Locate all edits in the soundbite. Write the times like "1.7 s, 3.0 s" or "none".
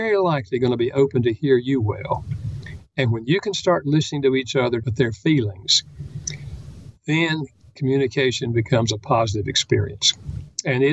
4.8 s